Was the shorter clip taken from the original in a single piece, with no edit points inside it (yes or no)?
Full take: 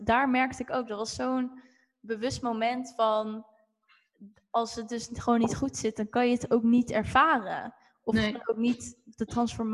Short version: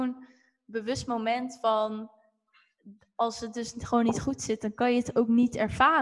yes